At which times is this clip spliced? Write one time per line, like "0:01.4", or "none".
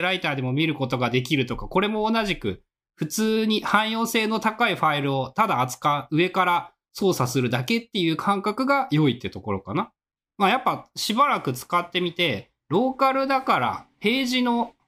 0:10.3